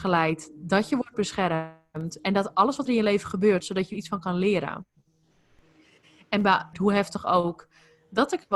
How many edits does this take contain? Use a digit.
2